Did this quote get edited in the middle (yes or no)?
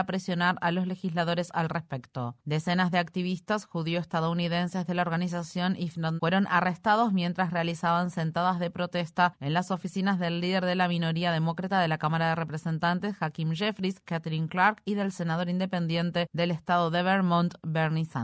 yes